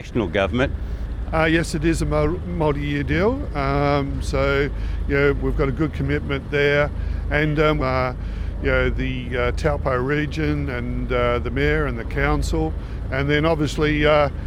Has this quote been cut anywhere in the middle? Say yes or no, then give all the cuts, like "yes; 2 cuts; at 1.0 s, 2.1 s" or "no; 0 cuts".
yes; 2 cuts; at 1.3 s, 7.8 s